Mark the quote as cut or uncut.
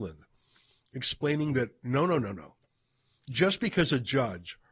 uncut